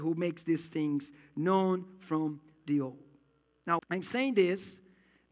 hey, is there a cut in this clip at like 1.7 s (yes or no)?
no